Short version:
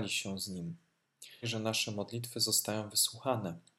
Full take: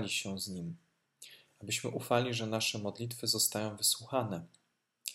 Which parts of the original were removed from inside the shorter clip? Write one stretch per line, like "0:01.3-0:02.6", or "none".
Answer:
0:01.4-0:02.3